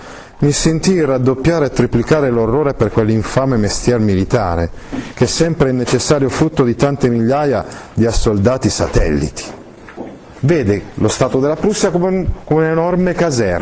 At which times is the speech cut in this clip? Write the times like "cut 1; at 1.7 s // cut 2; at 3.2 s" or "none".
cut 1; at 5.1 s // cut 2; at 10.4 s

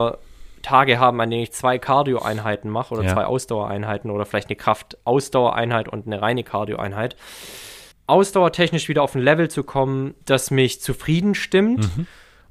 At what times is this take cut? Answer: cut 1; at 7.9 s // cut 2; at 10.2 s

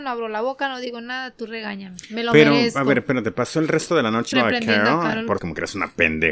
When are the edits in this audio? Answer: cut 1; at 4.3 s // cut 2; at 5.4 s

